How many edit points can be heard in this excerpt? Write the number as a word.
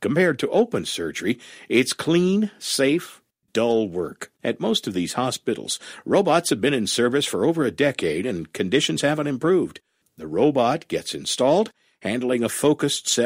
two